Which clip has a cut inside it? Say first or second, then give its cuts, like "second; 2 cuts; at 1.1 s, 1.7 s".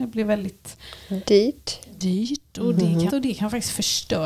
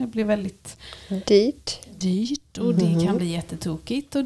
first; 1 cut; at 3.1 s